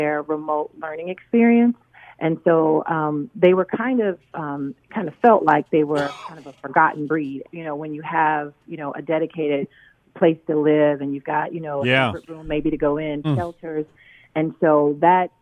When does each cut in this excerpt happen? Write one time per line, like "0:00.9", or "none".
0:07.4
0:13.2